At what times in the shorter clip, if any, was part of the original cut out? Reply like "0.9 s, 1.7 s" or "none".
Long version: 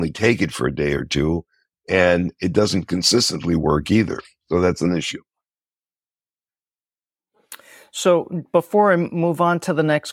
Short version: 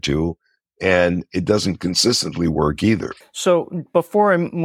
3.2 s